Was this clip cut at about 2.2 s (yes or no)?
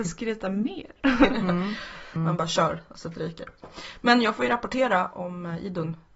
yes